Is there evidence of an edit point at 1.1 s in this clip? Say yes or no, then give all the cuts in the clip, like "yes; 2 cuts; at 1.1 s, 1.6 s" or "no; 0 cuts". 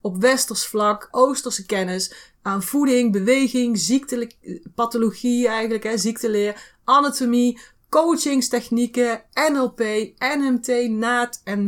yes; 1 cut; at 1.1 s